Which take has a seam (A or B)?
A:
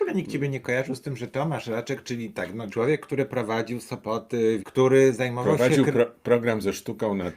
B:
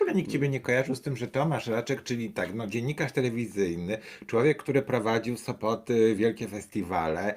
A